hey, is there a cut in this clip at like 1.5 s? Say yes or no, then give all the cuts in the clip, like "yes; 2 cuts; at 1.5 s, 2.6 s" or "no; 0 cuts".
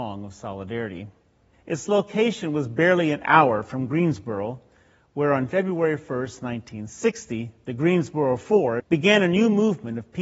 yes; 2 cuts; at 1.5 s, 8.8 s